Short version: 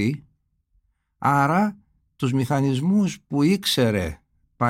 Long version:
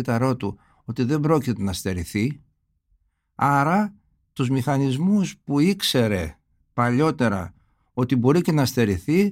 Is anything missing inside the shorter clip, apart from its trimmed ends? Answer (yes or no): no